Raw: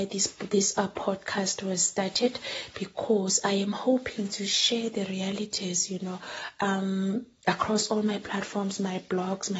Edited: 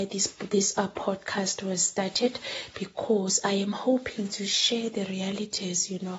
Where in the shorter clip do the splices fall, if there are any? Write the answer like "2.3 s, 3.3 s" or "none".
none